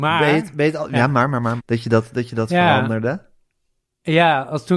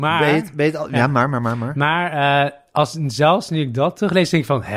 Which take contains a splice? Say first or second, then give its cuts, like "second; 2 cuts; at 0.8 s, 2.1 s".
first; 1 cut; at 1.6 s